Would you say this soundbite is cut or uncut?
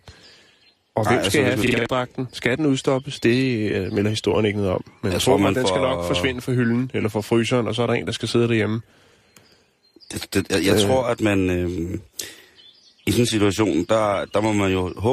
uncut